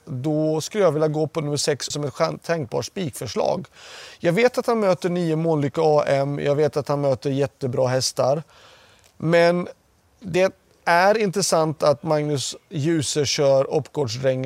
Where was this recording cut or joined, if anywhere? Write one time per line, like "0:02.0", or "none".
0:01.9